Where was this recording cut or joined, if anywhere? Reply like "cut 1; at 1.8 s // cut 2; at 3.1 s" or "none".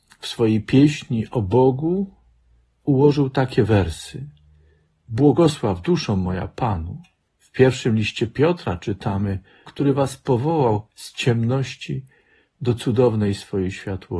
cut 1; at 7.2 s // cut 2; at 9.7 s

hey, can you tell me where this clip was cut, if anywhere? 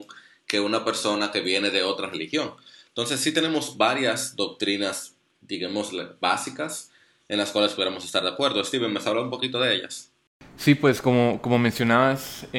none

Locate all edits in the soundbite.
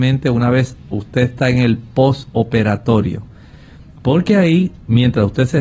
none

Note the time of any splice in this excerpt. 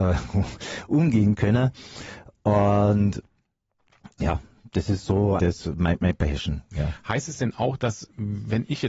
cut 1; at 5.4 s

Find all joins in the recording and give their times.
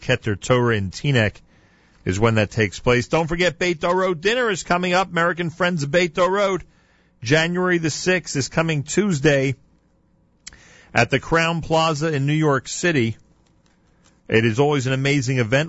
none

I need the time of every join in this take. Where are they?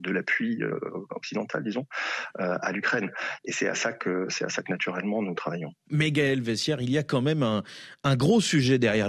none

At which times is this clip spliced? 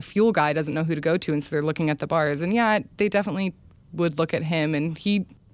none

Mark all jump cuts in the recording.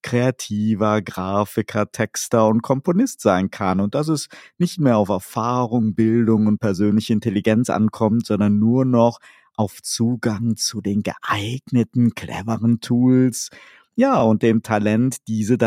none

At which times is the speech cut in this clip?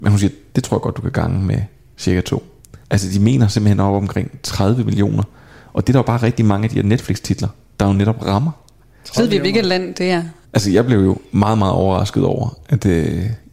cut 1; at 2.8 s // cut 2; at 10.4 s

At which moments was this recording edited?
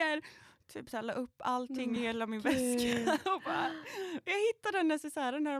none

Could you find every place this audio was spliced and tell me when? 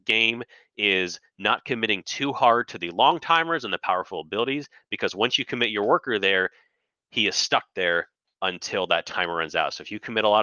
none

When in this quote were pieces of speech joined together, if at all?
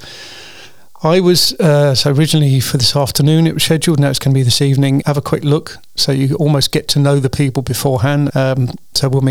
cut 1; at 5.0 s // cut 2; at 8.3 s

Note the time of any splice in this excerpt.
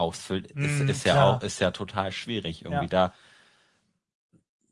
none

